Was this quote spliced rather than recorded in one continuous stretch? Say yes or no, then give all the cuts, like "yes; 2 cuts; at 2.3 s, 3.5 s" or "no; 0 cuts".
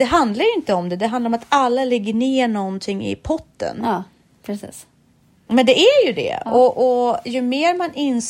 yes; 1 cut; at 5.5 s